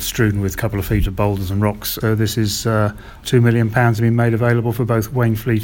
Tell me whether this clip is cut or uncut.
cut